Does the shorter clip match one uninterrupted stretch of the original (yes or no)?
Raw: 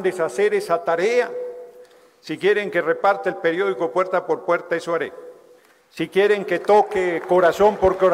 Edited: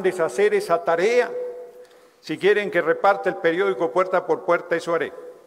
yes